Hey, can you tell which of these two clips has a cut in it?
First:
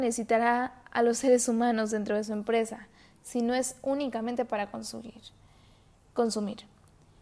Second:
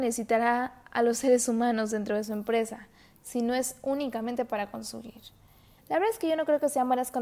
second; 1 cut; at 5.8 s

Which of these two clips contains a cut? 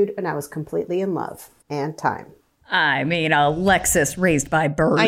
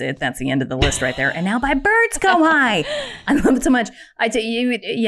first; 1 cut; at 1.6 s

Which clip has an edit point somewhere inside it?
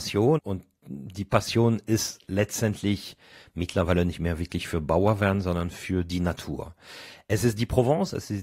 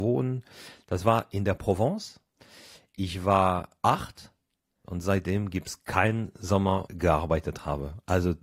second; 1 cut; at 6.9 s

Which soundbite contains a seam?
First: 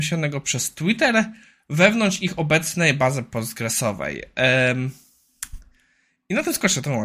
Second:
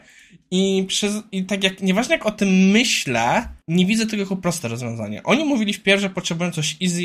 second; 1 cut; at 3.6 s

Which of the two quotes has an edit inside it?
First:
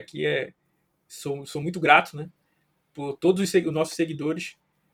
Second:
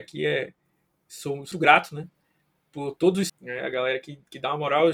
second; 2 cuts; at 1.5 s, 3.3 s

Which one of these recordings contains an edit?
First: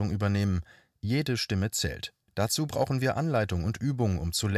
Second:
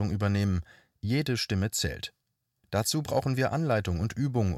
first; 1 cut; at 2.2 s

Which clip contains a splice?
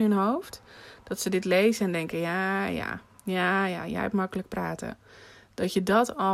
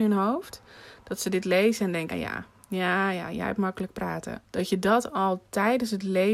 second; 2 cuts; at 2.1 s, 4.4 s

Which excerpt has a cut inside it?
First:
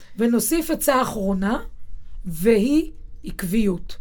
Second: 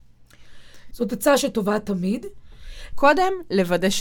second; 2 cuts; at 0.9 s, 2.9 s

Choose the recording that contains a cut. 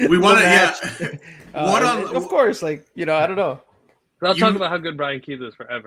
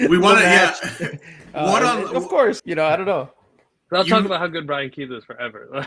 second; 1 cut; at 2.6 s

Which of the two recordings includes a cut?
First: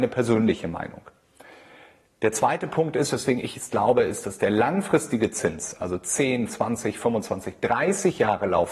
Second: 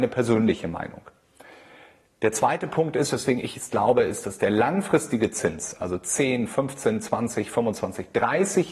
first; 1 cut; at 6.5 s

